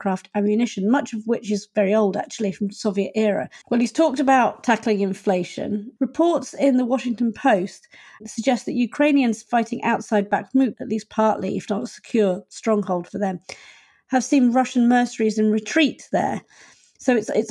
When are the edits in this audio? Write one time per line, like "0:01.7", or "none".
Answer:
0:03.6
0:06.0
0:10.7